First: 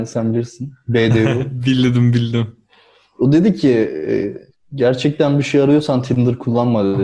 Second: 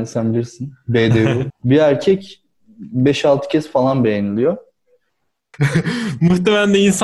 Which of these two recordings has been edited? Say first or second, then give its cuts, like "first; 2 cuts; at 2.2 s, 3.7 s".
second; 2 cuts; at 1.5 s, 5.5 s